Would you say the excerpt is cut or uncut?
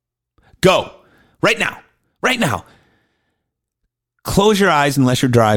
uncut